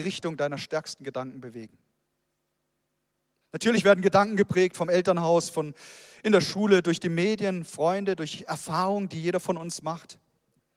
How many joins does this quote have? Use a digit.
1